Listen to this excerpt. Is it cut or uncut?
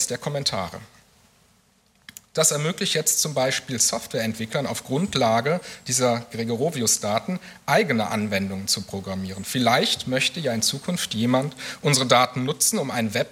uncut